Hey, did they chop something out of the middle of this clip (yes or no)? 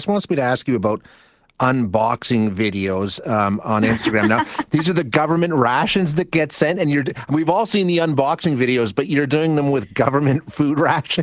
no